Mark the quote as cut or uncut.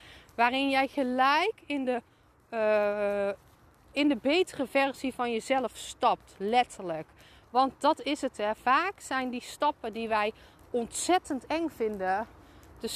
uncut